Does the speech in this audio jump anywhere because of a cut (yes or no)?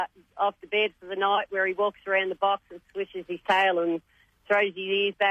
no